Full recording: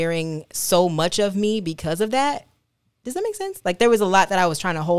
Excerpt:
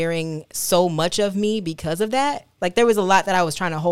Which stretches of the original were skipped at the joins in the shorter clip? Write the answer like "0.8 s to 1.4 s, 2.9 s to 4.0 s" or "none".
2.6 s to 3.6 s